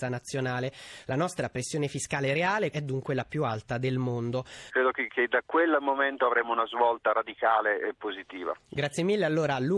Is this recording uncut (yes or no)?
no